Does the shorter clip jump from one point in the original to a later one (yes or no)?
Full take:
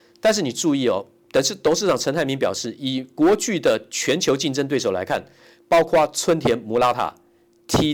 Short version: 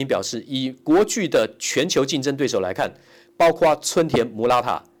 no